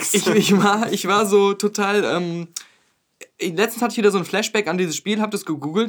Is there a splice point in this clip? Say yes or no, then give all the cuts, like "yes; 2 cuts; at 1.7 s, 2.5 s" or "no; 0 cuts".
no; 0 cuts